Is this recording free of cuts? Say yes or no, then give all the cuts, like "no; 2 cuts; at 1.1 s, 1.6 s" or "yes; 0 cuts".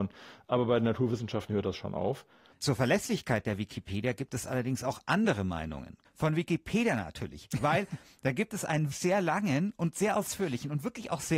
no; 3 cuts; at 2.5 s, 6.0 s, 8.9 s